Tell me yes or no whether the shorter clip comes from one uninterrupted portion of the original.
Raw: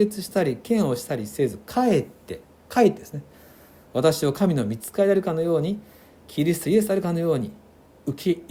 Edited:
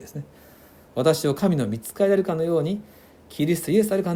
yes